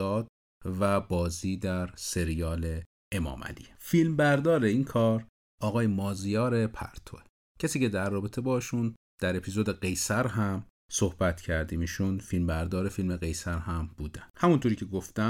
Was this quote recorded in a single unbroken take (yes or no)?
no